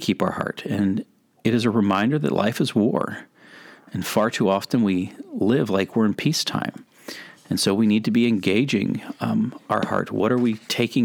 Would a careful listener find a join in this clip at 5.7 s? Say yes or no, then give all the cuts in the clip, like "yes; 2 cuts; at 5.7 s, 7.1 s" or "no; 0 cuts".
no; 0 cuts